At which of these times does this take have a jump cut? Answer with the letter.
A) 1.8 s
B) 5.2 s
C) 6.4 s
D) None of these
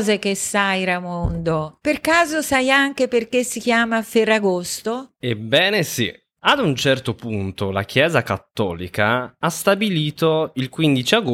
C